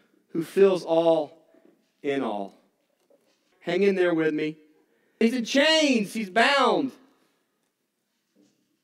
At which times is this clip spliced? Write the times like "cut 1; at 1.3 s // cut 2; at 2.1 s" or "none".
cut 1; at 3.5 s // cut 2; at 5.2 s